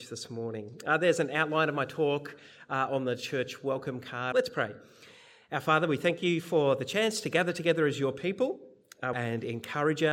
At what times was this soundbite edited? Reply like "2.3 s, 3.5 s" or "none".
4.3 s, 9.1 s